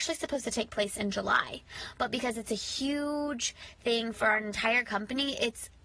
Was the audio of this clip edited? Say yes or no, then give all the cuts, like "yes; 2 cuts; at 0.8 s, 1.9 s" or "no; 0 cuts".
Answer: no; 0 cuts